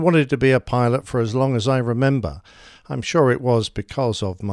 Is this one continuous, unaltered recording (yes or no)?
yes